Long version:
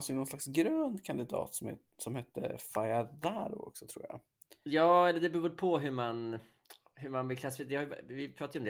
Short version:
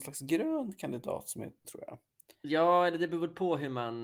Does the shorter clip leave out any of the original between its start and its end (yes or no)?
yes